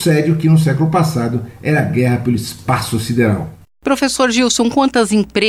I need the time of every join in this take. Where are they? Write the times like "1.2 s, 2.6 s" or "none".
none